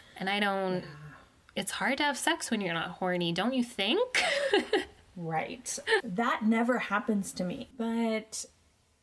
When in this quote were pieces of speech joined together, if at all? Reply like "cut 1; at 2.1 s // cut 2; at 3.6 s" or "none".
cut 1; at 6.0 s // cut 2; at 7.7 s